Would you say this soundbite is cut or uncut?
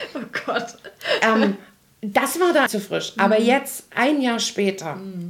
cut